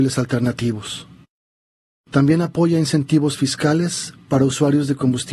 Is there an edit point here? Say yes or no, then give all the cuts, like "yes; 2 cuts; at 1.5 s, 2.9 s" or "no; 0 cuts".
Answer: yes; 1 cut; at 1.9 s